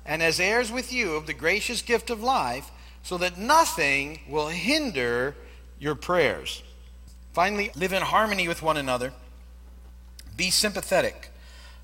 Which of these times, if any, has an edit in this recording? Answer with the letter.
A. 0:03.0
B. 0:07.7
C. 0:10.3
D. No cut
B